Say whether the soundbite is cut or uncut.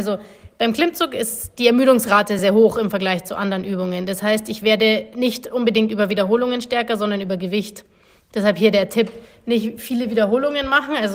cut